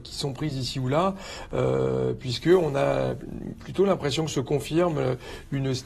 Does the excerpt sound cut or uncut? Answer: uncut